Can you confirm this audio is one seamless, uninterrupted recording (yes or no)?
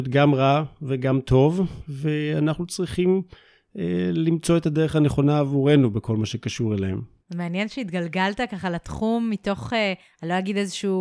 no